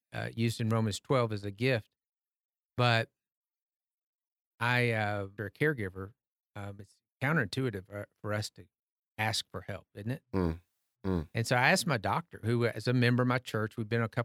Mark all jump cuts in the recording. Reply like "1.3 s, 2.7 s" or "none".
5.4 s